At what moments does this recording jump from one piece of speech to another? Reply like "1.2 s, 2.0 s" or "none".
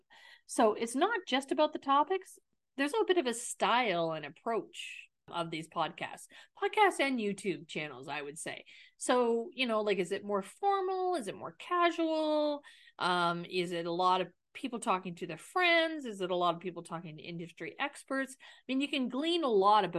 2.9 s